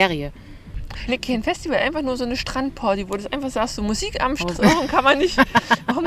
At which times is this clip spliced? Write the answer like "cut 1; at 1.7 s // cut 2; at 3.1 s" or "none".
cut 1; at 1.1 s // cut 2; at 4.5 s